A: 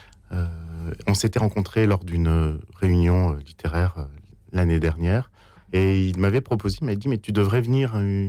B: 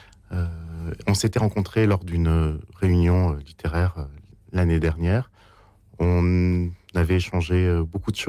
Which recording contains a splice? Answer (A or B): A